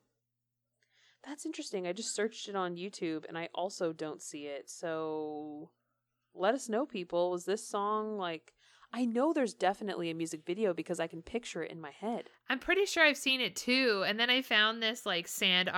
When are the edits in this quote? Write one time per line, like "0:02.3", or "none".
none